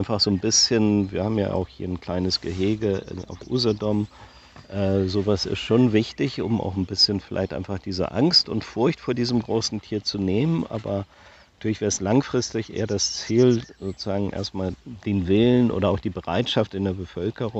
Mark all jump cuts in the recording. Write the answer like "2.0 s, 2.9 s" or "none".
none